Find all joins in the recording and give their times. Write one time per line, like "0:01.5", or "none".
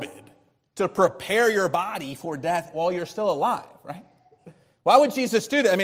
none